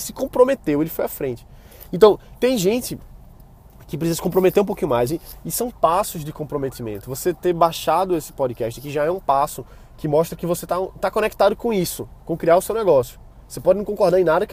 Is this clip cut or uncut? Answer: uncut